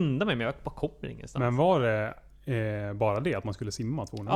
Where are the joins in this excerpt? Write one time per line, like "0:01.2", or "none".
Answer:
none